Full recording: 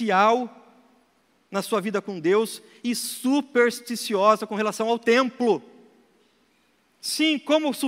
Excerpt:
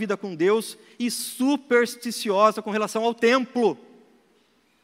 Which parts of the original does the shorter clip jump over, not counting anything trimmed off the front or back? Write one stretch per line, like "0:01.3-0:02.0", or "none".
none